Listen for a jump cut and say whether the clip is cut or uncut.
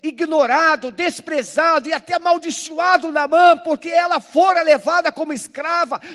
uncut